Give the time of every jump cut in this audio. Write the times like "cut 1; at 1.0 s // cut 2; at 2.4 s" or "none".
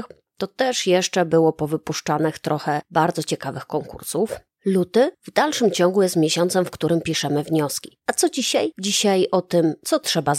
cut 1; at 8.0 s